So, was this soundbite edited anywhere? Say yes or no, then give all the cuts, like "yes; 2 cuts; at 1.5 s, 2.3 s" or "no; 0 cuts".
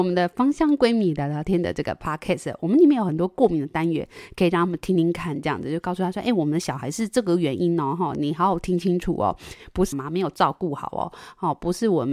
yes; 1 cut; at 9.9 s